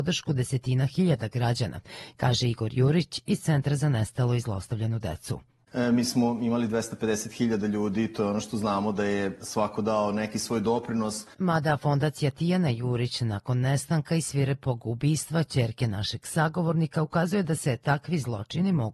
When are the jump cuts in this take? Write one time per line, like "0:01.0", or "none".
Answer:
0:11.3